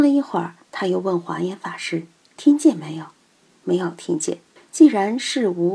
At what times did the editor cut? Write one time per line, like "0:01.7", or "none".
0:04.6